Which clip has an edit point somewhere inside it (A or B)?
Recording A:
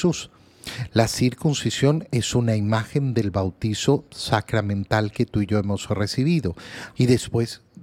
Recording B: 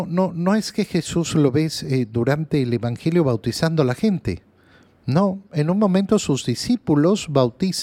A